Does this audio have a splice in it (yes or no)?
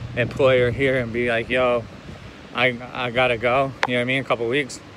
no